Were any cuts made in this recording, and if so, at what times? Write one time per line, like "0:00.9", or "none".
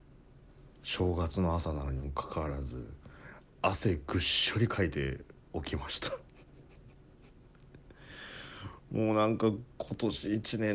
none